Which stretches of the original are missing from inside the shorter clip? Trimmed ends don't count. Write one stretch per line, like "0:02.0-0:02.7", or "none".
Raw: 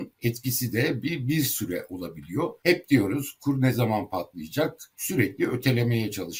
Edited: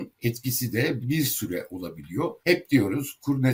0:01.0-0:01.2